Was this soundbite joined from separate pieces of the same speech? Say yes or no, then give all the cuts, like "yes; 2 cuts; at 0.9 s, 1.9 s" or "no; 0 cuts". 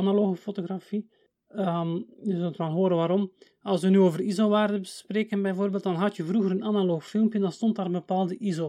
no; 0 cuts